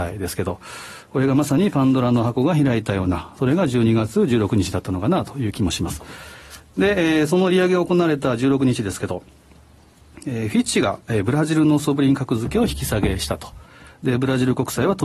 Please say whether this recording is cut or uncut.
uncut